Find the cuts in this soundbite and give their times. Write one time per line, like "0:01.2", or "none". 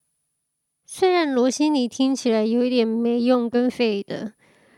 0:03.7